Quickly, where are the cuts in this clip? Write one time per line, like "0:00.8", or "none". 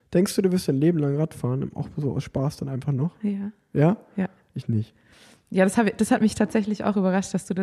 none